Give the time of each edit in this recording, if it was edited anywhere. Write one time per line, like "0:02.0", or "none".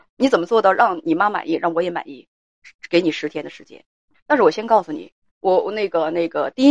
0:05.3